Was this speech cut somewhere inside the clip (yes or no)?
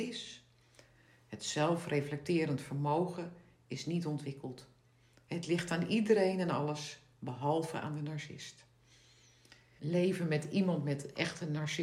yes